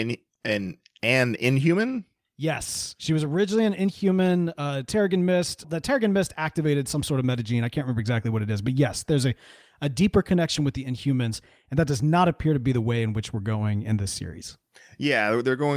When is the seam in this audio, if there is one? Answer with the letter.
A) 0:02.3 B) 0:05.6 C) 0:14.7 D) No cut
B